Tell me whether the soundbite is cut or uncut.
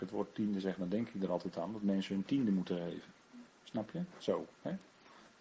cut